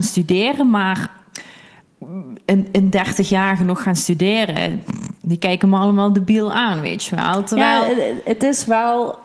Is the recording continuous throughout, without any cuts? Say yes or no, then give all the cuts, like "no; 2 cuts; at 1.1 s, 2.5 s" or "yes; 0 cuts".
yes; 0 cuts